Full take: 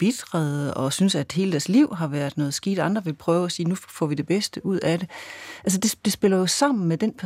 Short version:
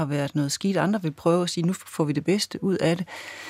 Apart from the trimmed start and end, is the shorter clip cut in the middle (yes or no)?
no